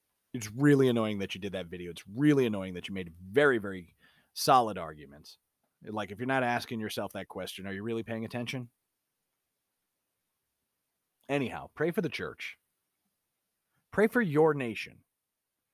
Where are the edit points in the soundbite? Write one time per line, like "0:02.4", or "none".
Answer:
0:05.6